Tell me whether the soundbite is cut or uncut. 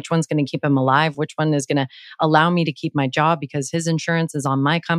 uncut